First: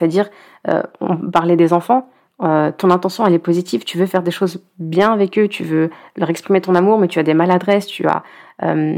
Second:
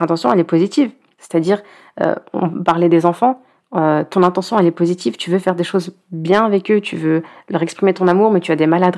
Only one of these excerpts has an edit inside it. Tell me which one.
second; 1 cut; at 1.2 s

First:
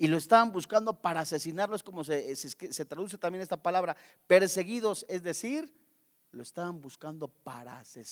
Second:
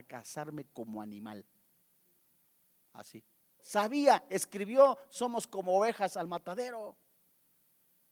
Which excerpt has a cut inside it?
second; 1 cut; at 3.6 s

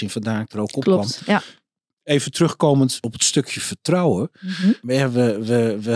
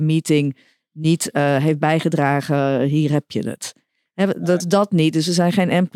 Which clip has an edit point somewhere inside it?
second; 1 cut; at 4.6 s

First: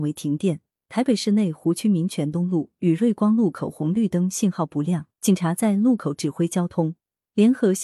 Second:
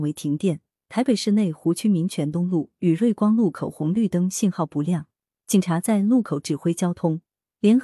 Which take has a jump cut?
first; 1 cut; at 5.1 s

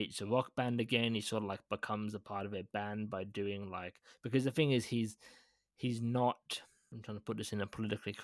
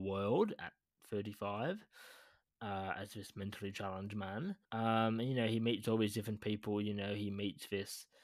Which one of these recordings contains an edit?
second; 1 cut; at 4.6 s

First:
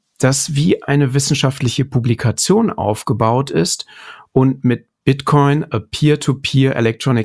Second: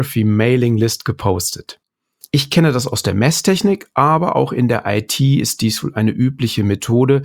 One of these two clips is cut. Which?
second; 1 cut; at 2.2 s

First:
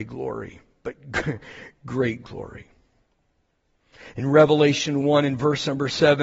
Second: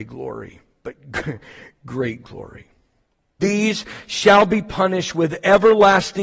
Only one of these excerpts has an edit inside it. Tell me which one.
second; 1 cut; at 3.4 s

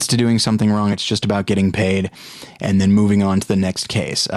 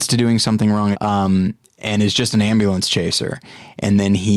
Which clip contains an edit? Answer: second; 1 cut; at 0.9 s

